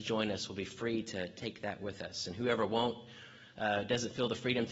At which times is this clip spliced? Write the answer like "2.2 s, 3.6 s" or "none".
none